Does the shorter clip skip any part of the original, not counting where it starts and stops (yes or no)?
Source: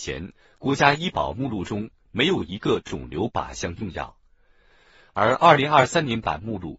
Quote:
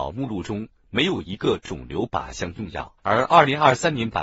yes